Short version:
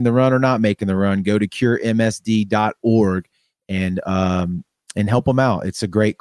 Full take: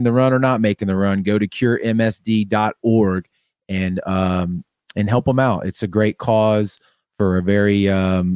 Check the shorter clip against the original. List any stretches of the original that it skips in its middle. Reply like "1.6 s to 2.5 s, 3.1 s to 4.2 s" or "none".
none